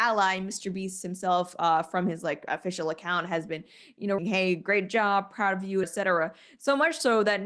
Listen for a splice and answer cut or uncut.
cut